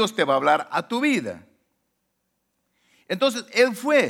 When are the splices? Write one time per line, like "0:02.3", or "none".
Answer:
none